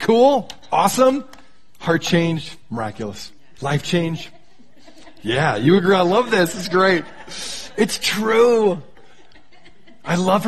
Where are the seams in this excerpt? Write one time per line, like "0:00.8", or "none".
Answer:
0:03.5